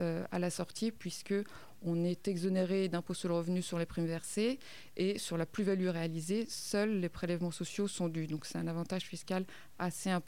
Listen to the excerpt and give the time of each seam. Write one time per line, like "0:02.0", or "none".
none